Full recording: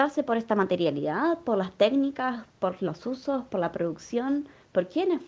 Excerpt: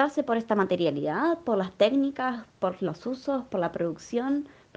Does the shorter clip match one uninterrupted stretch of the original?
yes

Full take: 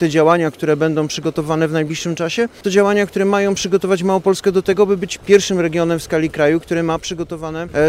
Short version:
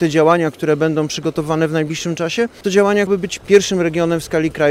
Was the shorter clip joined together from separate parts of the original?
yes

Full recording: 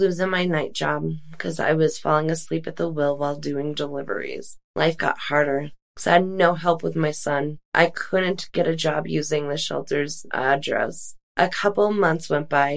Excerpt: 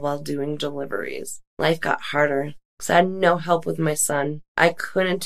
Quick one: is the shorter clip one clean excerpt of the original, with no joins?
yes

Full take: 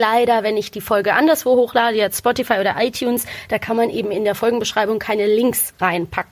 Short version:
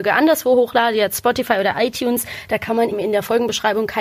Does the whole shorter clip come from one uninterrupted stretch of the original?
no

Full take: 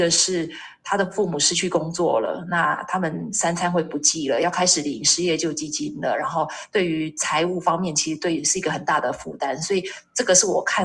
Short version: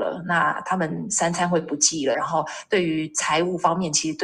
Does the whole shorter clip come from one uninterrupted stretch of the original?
no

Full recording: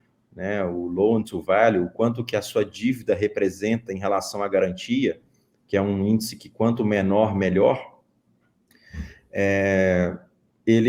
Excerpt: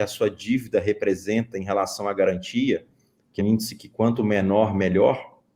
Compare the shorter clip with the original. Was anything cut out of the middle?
yes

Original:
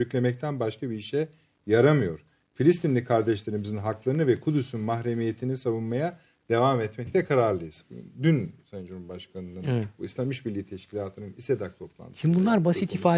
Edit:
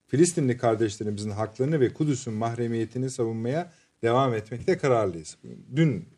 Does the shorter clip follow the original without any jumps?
yes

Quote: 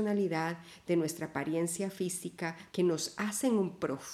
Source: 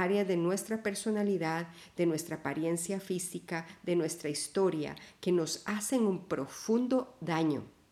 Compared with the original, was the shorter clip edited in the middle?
yes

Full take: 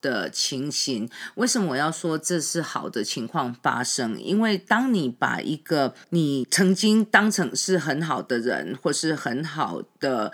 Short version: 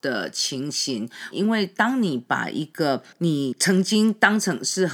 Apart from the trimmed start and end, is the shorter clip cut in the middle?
yes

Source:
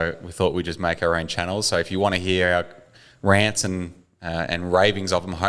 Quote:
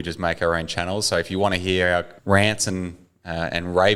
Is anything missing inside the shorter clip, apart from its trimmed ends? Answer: yes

